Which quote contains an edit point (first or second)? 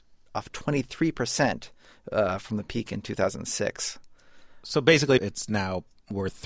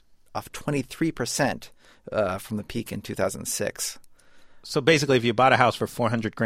first